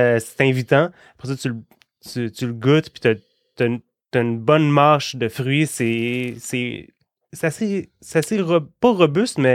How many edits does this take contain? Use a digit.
0